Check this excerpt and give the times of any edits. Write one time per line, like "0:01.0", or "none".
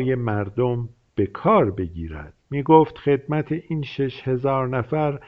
0:02.4